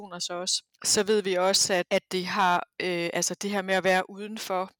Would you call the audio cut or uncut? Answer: uncut